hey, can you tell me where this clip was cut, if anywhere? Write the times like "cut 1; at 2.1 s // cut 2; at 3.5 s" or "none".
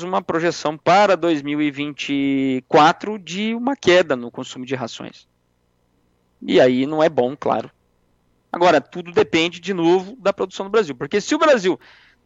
none